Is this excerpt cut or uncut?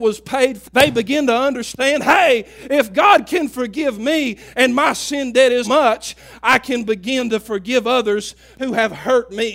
cut